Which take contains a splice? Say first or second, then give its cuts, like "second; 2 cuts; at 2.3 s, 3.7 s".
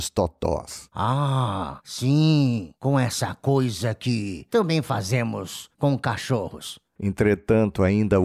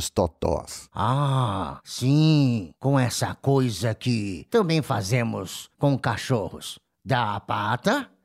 first; 1 cut; at 7.0 s